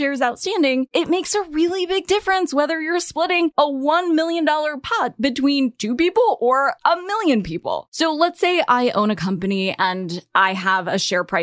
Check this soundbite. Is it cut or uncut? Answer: cut